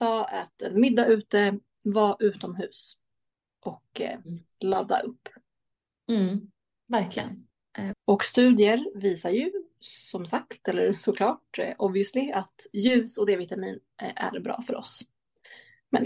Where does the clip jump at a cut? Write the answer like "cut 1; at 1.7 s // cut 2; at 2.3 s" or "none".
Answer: cut 1; at 7.9 s